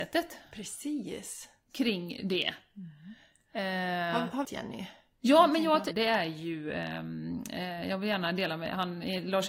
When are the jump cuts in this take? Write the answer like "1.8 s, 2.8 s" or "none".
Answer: 4.4 s, 5.9 s